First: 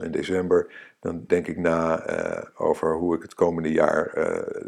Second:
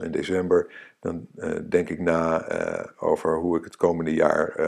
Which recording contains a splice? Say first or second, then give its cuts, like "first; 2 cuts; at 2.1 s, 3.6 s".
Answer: first; 1 cut; at 1.3 s